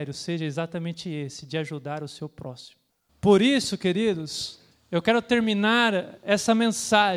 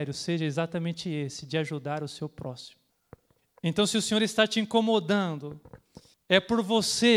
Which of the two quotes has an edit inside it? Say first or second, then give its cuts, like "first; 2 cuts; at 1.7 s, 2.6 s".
first; 1 cut; at 3.1 s